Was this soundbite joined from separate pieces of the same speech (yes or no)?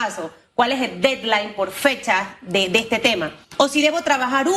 yes